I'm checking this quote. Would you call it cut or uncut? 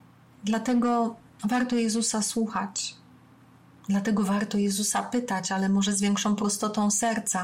uncut